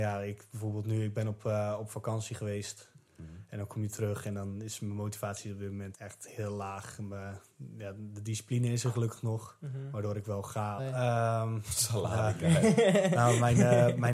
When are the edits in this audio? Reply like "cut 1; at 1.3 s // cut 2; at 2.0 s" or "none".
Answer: cut 1; at 5.9 s // cut 2; at 10.8 s